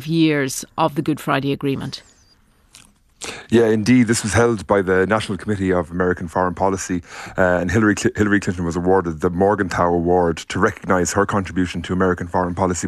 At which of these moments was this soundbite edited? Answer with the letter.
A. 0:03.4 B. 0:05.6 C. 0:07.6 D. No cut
D